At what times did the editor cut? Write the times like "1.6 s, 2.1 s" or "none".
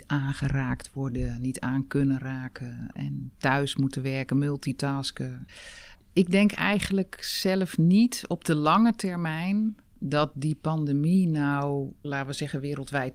2.9 s, 5.9 s, 12.0 s